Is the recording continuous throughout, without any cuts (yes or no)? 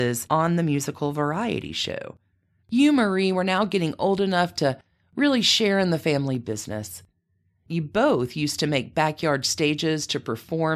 no